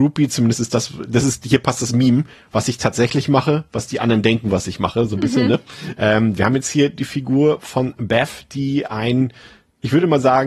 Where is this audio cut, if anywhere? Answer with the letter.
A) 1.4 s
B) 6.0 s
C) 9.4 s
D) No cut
B